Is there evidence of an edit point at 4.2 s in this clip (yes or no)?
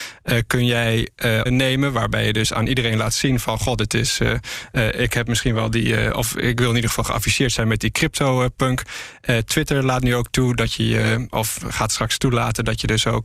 no